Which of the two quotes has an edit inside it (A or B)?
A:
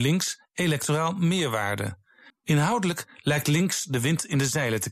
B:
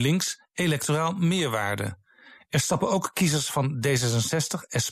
A